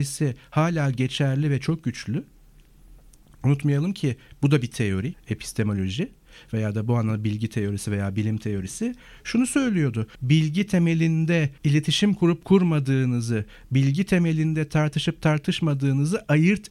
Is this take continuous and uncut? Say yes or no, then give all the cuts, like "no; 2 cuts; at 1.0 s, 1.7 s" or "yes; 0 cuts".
no; 3 cuts; at 5.1 s, 10.1 s, 11.6 s